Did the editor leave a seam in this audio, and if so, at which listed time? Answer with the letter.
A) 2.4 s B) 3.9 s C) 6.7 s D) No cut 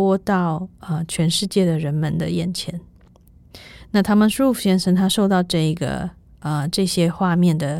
D